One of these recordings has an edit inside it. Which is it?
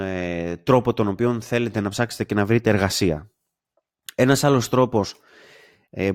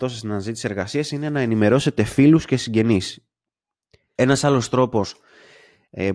second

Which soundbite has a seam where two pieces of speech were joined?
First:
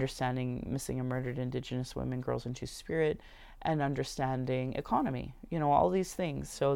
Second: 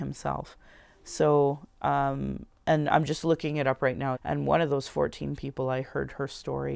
second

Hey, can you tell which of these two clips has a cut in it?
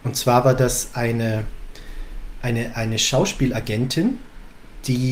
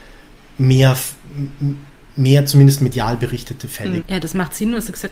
second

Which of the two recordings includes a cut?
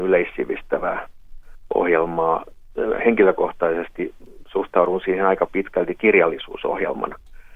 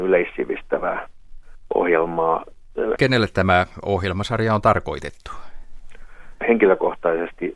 second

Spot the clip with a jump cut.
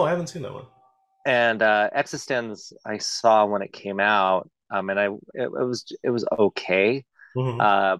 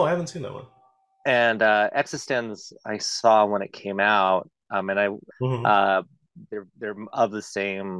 second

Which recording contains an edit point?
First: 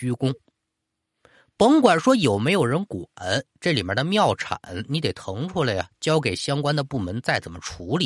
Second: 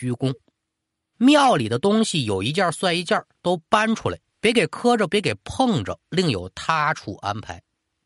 second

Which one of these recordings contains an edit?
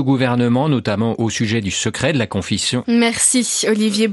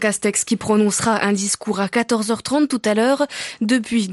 first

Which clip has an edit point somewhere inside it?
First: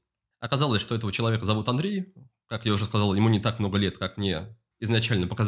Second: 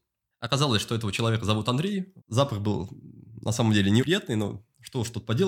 second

